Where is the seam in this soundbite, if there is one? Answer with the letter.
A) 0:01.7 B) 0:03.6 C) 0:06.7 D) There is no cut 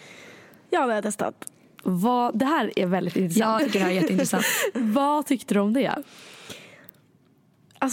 B